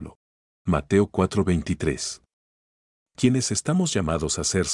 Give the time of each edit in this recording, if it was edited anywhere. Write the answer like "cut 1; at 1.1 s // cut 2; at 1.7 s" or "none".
cut 1; at 3.0 s